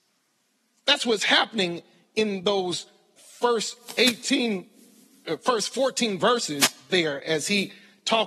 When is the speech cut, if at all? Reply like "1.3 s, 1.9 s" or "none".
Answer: 3.2 s